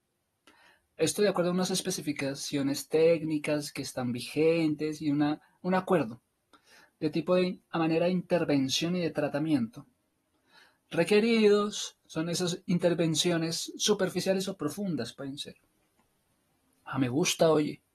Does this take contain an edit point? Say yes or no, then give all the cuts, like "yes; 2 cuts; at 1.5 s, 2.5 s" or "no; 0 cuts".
no; 0 cuts